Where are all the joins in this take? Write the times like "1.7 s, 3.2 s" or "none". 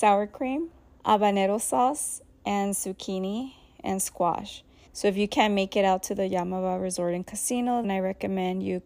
1.0 s, 4.9 s, 7.8 s